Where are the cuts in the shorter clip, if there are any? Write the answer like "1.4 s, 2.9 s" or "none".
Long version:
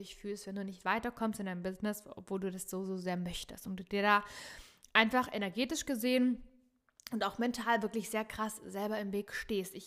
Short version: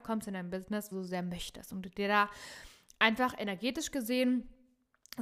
0.9 s